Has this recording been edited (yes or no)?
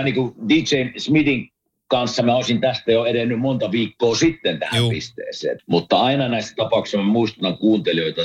yes